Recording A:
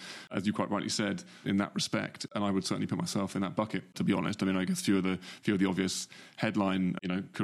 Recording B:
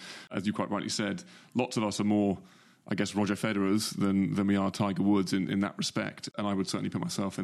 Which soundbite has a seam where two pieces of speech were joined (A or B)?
A